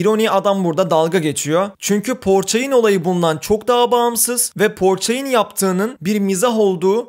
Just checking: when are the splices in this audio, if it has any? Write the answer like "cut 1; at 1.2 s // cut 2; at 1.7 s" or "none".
cut 1; at 1.7 s